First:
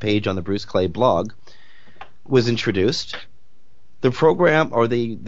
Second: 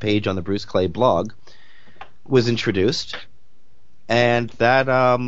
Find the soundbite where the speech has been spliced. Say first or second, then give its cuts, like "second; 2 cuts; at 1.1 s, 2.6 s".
first; 1 cut; at 4.0 s